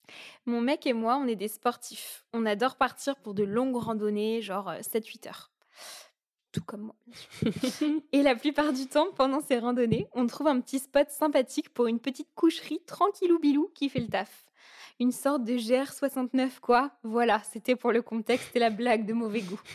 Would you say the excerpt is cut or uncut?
uncut